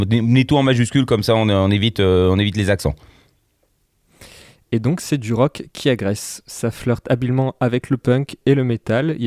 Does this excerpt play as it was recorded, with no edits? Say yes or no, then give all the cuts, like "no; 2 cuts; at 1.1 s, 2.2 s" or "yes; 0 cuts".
yes; 0 cuts